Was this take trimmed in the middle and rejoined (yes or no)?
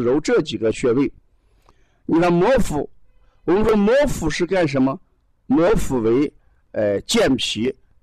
no